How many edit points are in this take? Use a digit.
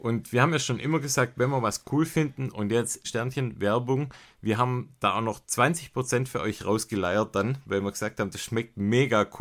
1